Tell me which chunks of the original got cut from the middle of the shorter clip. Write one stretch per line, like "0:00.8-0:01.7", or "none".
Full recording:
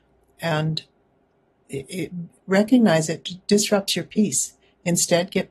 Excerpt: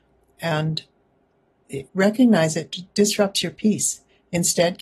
0:01.9-0:02.4